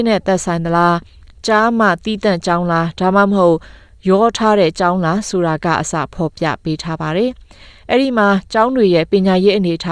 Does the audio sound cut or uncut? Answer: uncut